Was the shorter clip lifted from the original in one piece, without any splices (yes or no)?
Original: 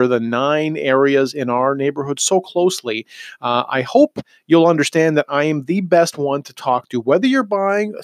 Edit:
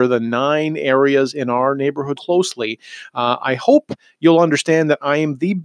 no